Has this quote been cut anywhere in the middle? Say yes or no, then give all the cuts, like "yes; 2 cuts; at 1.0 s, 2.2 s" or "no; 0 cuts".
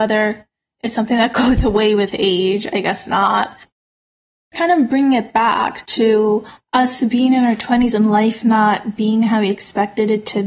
no; 0 cuts